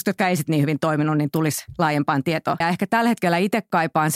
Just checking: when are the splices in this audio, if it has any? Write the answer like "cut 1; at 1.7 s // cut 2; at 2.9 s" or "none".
cut 1; at 2.6 s